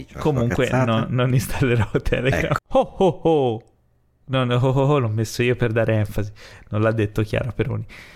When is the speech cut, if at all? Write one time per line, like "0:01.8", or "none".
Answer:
0:01.3
0:02.6